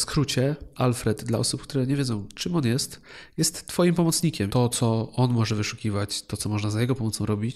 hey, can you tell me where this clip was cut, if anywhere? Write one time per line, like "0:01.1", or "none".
0:04.5